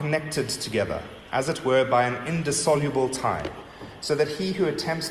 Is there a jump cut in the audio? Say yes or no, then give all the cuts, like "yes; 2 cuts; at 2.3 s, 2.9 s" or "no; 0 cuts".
no; 0 cuts